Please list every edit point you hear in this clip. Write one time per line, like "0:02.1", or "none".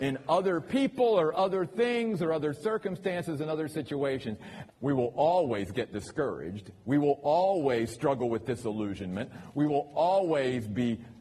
0:04.7